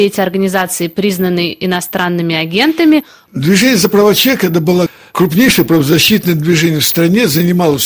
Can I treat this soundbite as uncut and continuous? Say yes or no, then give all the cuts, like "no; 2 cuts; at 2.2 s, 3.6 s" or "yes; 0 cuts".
no; 1 cut; at 3.3 s